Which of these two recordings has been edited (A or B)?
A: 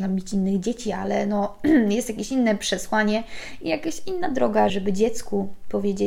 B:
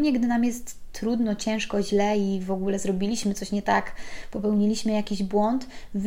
A